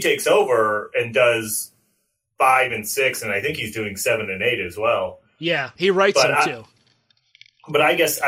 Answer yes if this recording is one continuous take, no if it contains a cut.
no